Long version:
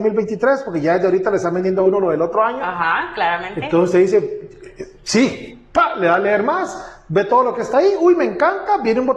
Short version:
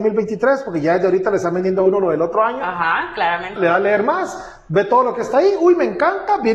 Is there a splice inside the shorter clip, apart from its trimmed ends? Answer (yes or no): yes